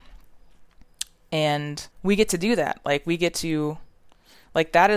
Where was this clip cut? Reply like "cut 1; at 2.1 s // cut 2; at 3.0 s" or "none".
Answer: cut 1; at 1.9 s